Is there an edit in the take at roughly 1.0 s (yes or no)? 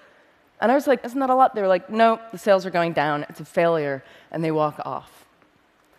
yes